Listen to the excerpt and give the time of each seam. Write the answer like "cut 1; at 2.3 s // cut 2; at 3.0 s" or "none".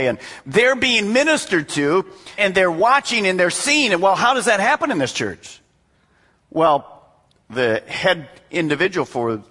cut 1; at 2.4 s